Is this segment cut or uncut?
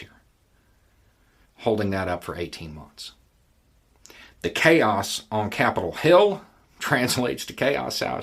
uncut